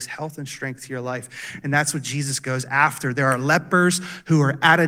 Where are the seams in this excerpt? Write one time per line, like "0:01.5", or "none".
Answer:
none